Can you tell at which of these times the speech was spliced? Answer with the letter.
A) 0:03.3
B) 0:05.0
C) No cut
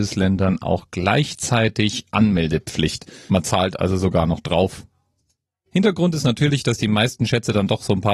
A